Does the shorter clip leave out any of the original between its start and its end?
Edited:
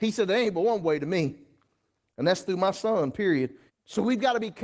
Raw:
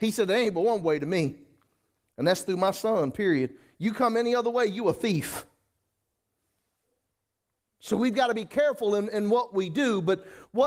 yes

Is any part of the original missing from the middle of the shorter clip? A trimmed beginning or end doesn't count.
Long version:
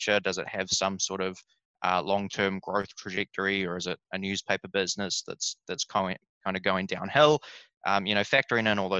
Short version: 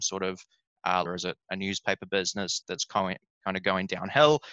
yes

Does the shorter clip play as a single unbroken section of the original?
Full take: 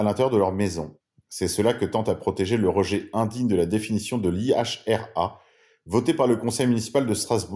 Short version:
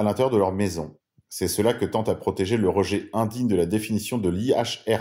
yes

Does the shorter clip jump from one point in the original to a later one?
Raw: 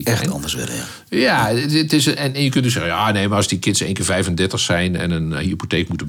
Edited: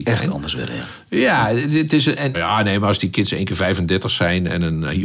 yes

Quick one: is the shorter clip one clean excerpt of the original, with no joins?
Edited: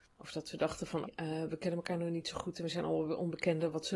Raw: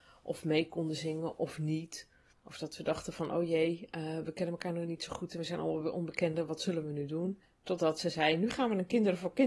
no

